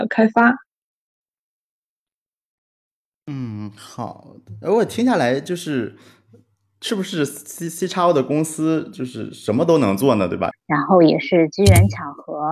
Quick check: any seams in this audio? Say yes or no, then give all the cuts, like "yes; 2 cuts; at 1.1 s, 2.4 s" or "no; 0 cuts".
yes; 1 cut; at 10.5 s